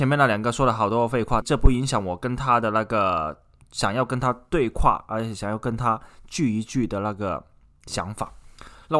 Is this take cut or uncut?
cut